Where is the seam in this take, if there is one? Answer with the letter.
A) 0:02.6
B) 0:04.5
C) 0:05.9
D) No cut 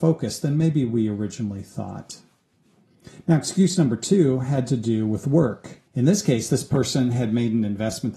C